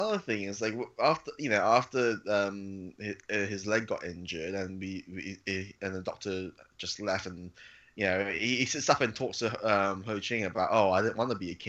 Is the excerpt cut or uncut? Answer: uncut